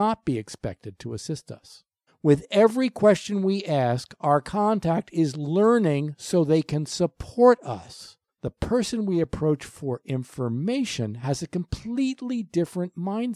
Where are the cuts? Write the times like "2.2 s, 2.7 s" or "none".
2.1 s, 8.3 s